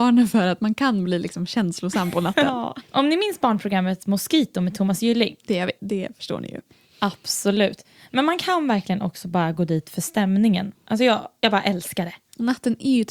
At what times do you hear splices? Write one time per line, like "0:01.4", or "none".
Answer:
0:02.8
0:05.8